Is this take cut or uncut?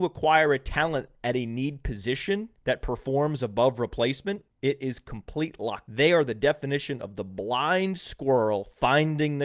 cut